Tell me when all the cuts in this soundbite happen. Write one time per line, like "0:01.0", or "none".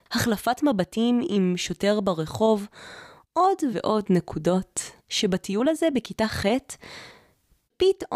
0:03.7
0:05.0